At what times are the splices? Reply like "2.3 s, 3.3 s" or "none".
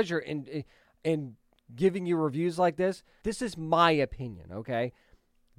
3.2 s